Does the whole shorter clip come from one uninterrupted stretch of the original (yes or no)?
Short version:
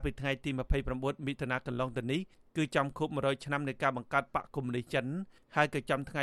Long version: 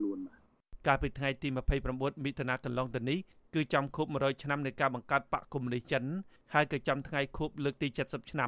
yes